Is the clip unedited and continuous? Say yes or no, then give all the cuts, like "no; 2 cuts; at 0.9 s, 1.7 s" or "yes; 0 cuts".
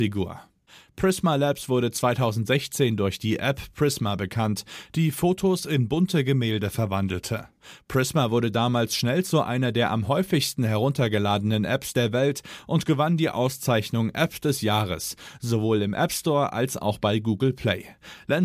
yes; 0 cuts